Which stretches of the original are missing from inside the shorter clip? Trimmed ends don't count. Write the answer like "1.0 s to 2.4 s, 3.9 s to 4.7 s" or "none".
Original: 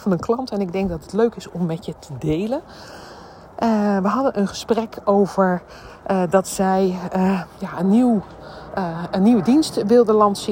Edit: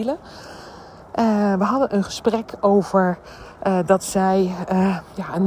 none